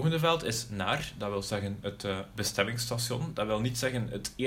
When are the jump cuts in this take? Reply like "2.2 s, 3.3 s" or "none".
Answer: none